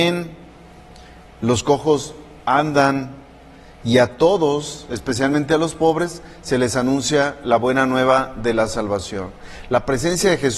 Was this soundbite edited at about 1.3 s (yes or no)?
yes